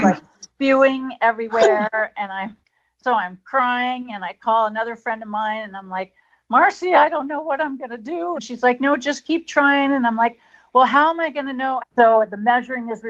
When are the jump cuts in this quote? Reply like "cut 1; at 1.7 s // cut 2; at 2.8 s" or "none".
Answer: cut 1; at 8.3 s // cut 2; at 11.8 s